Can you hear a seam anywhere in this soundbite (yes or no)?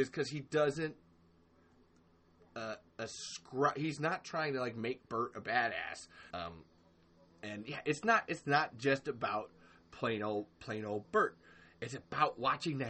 yes